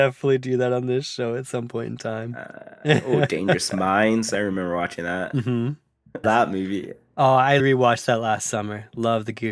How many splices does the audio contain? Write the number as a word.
two